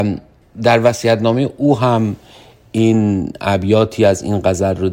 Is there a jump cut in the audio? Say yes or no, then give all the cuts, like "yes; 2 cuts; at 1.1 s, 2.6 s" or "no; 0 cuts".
no; 0 cuts